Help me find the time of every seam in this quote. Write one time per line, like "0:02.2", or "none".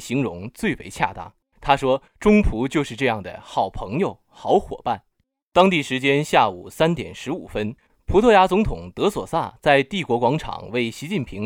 0:01.5